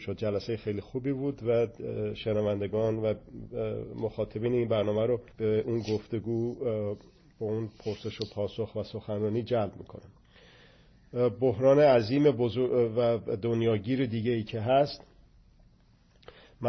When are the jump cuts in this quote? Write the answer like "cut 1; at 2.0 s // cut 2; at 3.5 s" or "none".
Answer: cut 1; at 5.3 s

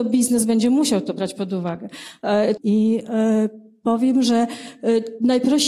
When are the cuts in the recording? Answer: cut 1; at 2.6 s

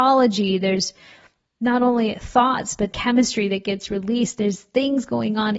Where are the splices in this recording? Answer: cut 1; at 2.9 s

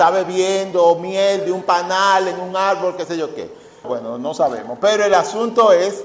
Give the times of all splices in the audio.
cut 1; at 3.8 s

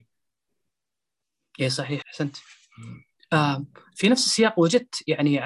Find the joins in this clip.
cut 1; at 2.0 s

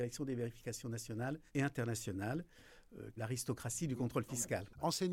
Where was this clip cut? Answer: cut 1; at 1.5 s // cut 2; at 3.2 s

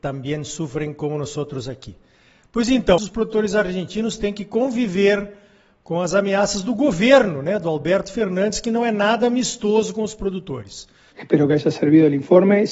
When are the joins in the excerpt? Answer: cut 1; at 3.0 s // cut 2; at 11.1 s

